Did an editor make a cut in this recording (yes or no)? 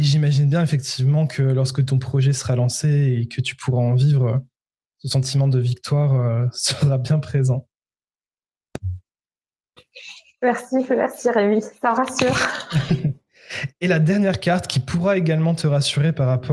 no